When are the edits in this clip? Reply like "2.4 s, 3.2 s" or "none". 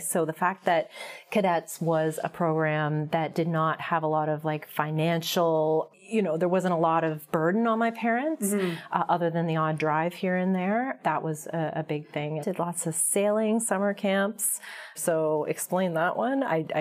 12.4 s, 14.9 s